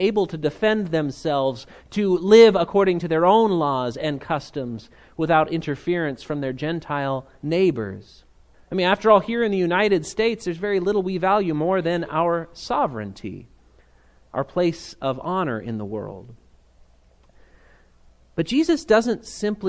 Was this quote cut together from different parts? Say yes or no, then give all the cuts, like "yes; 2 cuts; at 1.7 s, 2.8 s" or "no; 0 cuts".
yes; 1 cut; at 8.5 s